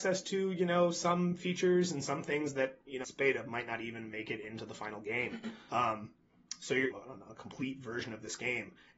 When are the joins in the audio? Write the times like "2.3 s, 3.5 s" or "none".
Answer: 3.0 s, 5.7 s, 6.9 s